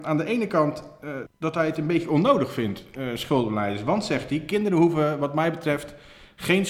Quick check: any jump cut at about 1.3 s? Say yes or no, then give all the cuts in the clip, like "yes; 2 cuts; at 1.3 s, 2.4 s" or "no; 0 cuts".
yes; 1 cut; at 1.3 s